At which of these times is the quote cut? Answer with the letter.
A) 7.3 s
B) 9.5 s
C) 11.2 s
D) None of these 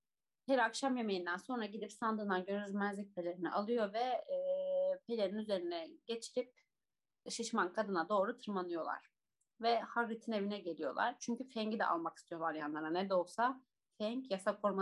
A